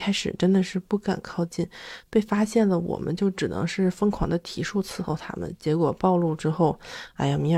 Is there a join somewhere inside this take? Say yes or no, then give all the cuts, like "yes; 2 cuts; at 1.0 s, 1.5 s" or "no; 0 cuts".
no; 0 cuts